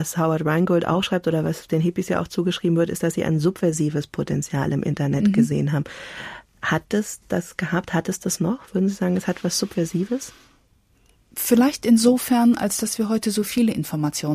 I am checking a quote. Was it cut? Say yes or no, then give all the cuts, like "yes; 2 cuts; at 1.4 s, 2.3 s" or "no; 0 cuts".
no; 0 cuts